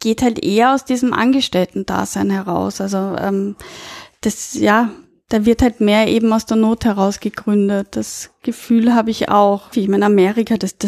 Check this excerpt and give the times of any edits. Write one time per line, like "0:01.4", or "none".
0:09.7